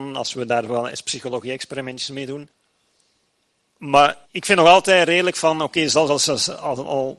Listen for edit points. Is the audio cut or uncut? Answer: cut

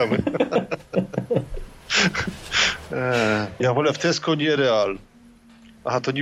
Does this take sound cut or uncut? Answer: cut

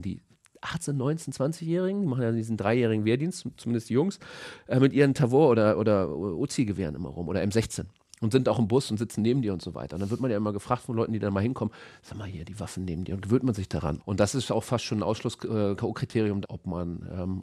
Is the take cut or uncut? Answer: cut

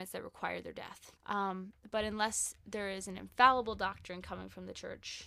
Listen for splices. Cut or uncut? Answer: cut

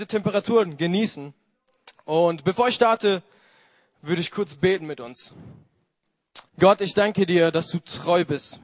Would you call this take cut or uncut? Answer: cut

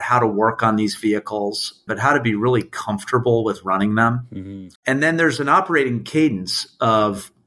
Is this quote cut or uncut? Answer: cut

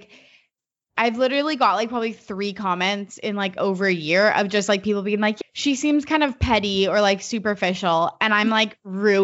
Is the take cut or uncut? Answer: cut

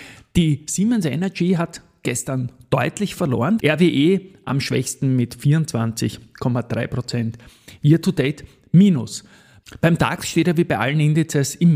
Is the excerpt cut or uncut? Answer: cut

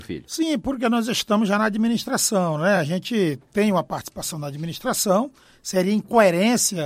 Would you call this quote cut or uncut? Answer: uncut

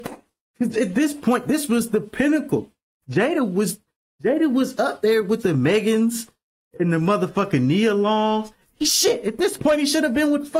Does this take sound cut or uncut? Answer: uncut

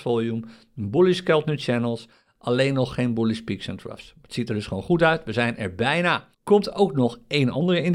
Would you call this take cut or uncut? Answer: cut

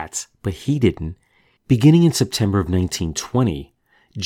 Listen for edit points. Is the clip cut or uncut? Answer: cut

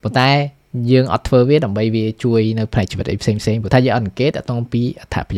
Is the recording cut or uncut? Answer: uncut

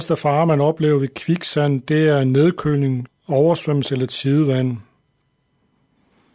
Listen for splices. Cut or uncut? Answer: cut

